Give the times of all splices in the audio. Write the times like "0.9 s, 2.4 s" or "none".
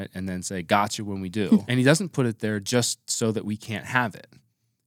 1.7 s